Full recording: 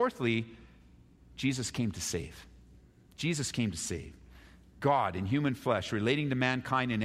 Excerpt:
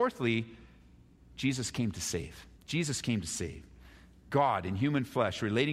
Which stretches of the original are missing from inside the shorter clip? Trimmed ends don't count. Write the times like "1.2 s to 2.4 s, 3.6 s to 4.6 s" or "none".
2.5 s to 3.0 s